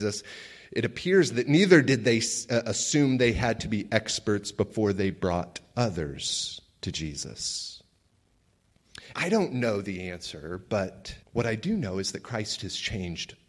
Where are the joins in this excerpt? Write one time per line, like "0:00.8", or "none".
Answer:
0:09.1
0:11.2